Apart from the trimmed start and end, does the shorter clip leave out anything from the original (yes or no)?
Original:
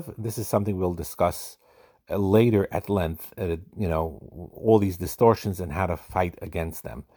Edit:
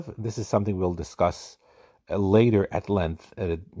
no